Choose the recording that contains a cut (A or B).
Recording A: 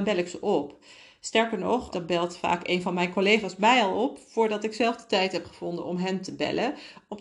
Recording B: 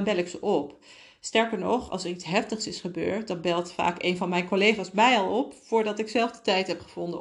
A